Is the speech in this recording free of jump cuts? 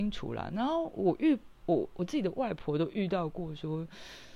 yes; 0 cuts

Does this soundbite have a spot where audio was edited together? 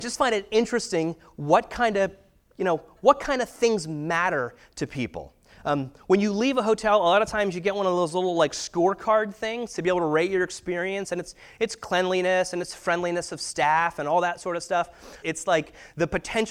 yes; 1 cut; at 15.2 s

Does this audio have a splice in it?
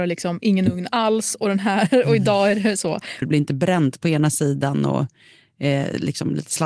yes; 1 cut; at 3.2 s

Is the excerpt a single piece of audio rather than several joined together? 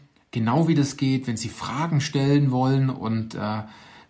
yes; 0 cuts

